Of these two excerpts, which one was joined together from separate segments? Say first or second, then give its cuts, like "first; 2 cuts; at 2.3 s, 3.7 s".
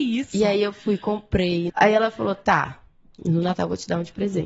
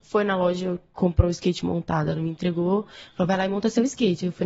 first; 1 cut; at 1.7 s